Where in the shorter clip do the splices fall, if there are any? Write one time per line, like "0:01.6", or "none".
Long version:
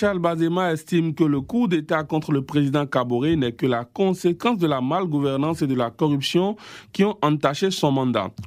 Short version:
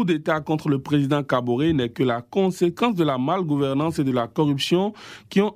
none